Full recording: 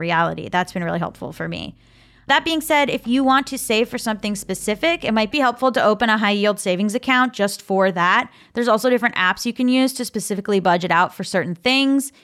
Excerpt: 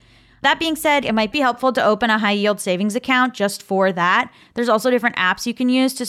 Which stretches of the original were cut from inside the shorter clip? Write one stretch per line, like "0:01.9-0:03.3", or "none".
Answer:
0:02.9-0:05.0